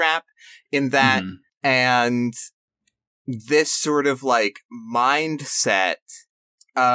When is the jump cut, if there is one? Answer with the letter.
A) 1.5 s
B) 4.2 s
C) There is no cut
A